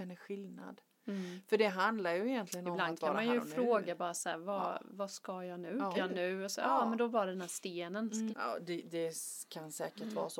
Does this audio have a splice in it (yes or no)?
yes